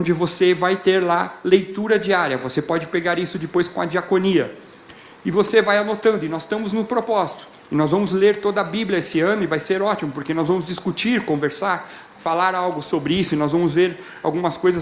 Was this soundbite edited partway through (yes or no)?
no